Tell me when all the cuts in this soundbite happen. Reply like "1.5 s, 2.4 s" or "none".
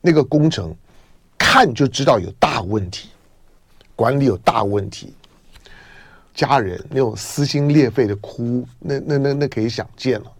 6.3 s